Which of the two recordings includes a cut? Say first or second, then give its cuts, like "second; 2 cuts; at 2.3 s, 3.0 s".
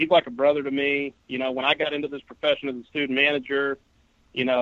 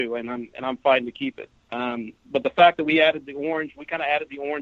second; 1 cut; at 1.6 s